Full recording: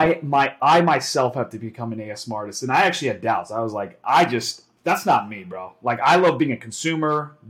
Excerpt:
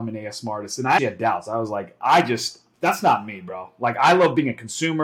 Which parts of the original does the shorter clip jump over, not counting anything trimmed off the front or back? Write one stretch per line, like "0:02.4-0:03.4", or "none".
0:02.8-0:03.0